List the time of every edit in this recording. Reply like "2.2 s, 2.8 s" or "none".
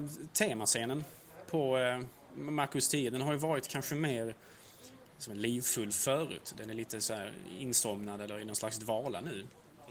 none